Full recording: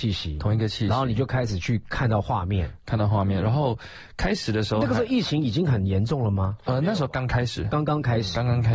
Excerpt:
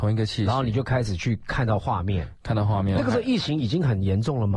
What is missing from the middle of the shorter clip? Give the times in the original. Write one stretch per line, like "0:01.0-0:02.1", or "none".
0:03.4-0:04.8